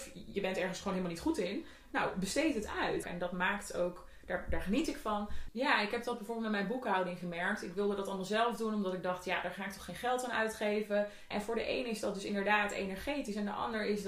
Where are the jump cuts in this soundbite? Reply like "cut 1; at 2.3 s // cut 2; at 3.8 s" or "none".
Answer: cut 1; at 3.0 s // cut 2; at 5.5 s // cut 3; at 11.3 s

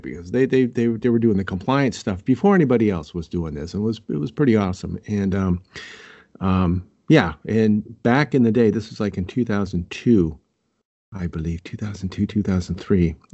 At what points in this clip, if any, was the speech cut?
none

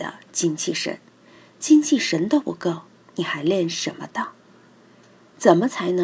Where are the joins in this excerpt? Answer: none

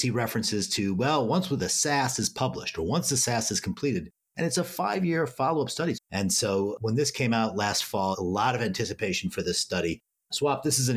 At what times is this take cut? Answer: cut 1; at 5.9 s // cut 2; at 8.1 s

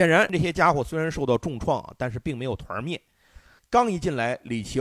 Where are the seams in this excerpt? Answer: cut 1; at 3.6 s

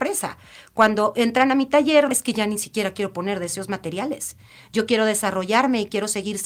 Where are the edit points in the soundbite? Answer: cut 1; at 2.1 s

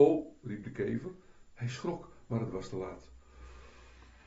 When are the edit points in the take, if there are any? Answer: cut 1; at 1.5 s

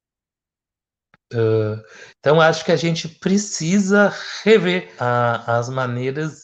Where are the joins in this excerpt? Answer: cut 1; at 1.3 s // cut 2; at 5.0 s

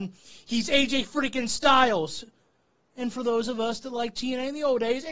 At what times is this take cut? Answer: none

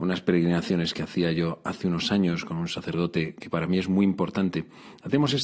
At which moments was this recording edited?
none

